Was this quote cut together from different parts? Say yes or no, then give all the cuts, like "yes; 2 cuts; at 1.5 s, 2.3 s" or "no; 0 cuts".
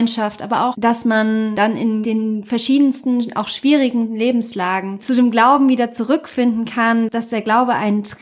yes; 1 cut; at 7.1 s